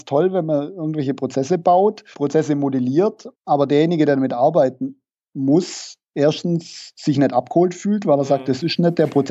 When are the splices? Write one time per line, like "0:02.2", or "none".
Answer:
0:02.1
0:03.3